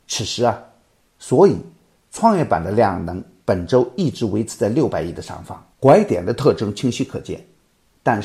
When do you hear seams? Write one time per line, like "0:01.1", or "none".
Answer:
0:01.2
0:05.7

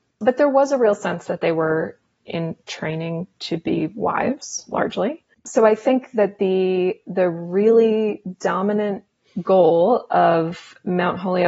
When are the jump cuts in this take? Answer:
0:05.3

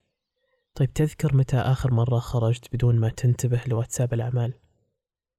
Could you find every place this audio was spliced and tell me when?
none

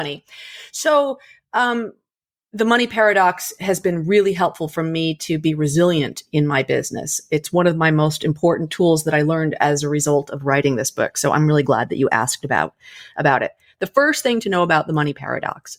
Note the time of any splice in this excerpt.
none

